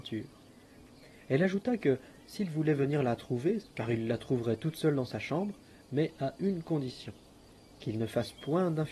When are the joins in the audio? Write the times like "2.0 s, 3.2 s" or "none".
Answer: 3.6 s